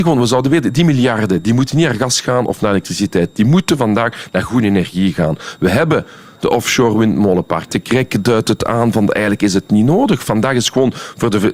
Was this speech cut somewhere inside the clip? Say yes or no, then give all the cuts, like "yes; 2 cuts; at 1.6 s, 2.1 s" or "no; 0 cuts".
yes; 1 cut; at 7.7 s